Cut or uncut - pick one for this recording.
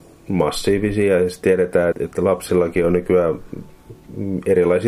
cut